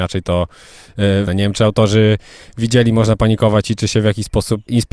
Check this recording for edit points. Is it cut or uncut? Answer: cut